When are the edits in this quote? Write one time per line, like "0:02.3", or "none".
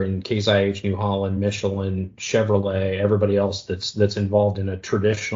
none